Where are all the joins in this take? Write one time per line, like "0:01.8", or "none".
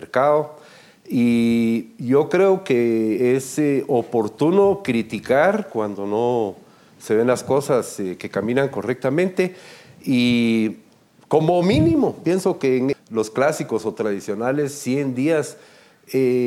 0:12.9